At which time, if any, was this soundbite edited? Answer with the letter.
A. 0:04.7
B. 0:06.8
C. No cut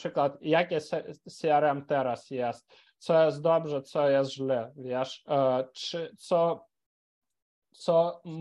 C